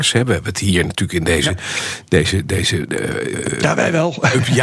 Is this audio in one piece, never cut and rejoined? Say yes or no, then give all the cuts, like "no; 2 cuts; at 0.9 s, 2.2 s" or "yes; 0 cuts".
yes; 0 cuts